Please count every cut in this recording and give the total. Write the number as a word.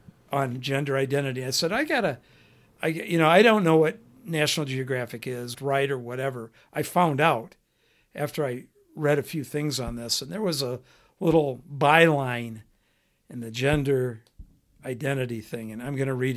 one